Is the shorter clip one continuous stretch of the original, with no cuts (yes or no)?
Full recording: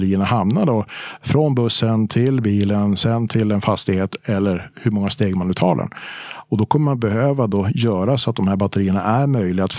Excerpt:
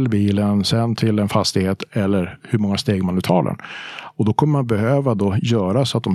yes